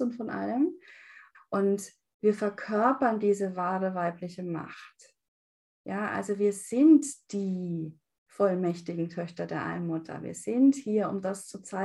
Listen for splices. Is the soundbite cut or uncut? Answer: cut